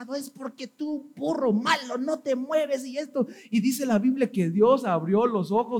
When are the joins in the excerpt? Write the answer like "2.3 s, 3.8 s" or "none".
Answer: none